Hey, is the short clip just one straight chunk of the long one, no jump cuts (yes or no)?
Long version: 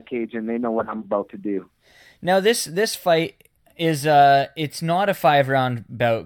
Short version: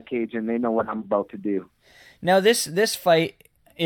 yes